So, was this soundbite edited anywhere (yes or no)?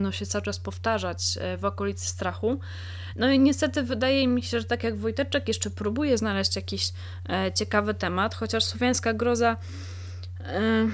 no